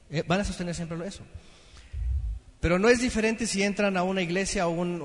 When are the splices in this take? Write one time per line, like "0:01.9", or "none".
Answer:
none